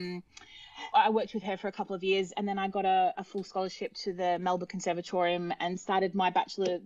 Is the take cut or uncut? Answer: cut